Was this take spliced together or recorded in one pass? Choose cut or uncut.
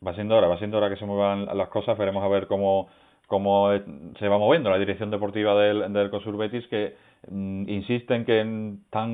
uncut